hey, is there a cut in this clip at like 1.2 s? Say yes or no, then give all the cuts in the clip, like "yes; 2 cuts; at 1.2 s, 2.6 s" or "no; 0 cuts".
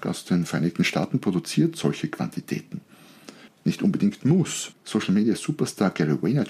no; 2 cuts; at 3.5 s, 4.7 s